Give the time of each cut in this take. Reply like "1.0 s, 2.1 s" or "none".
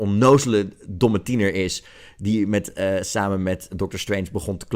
none